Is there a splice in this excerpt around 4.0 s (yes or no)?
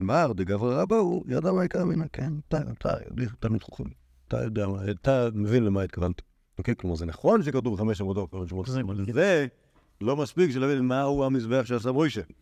no